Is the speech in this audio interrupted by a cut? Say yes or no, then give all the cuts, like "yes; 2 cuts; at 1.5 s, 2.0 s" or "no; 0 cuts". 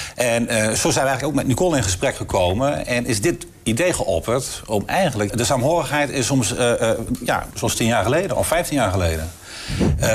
yes; 2 cuts; at 5.3 s, 7.5 s